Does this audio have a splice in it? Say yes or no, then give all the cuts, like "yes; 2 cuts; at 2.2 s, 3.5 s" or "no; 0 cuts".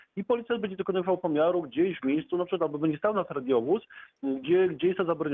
no; 0 cuts